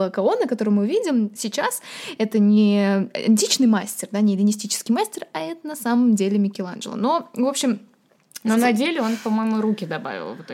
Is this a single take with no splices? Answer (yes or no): yes